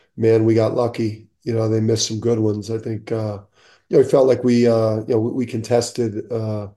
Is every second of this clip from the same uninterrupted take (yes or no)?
yes